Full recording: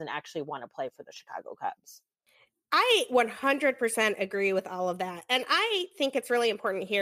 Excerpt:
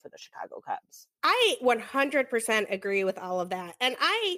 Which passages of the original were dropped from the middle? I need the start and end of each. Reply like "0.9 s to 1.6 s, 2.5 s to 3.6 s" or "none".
2.1 s to 2.7 s